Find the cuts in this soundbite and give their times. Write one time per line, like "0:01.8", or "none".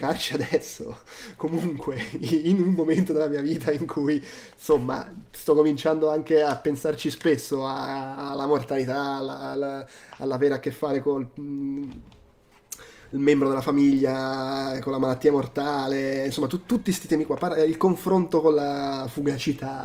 none